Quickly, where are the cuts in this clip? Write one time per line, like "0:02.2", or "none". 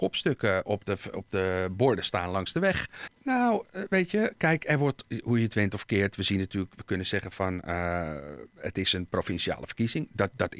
0:03.1